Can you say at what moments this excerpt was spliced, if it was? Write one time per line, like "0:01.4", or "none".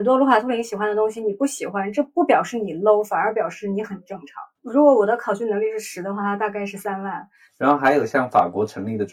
0:04.6